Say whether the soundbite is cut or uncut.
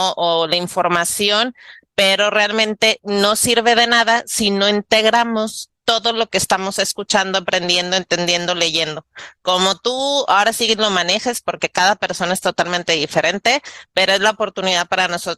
uncut